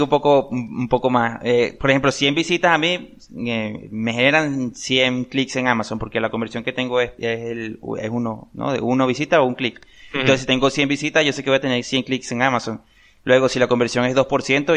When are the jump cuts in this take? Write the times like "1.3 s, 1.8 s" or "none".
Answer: none